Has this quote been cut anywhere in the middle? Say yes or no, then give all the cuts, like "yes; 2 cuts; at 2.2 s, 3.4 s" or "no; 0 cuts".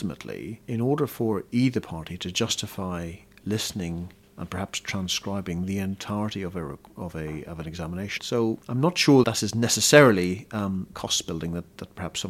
yes; 3 cuts; at 8.2 s, 9.2 s, 10.9 s